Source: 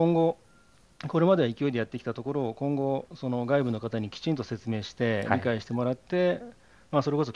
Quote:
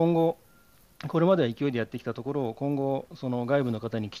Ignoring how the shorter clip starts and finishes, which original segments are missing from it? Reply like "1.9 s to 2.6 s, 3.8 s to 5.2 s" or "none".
none